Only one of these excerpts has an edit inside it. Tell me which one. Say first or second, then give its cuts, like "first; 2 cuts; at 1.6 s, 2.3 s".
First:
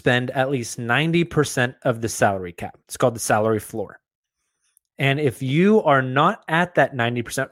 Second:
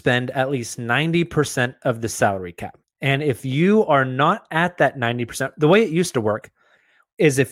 second; 1 cut; at 2.8 s